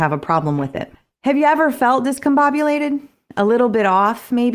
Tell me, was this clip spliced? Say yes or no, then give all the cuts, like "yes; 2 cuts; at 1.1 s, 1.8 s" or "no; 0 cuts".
no; 0 cuts